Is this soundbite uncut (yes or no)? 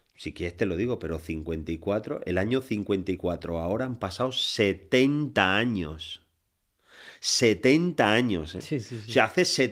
yes